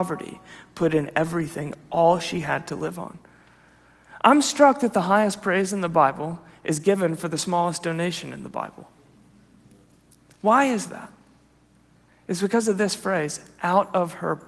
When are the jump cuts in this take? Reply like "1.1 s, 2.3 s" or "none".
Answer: none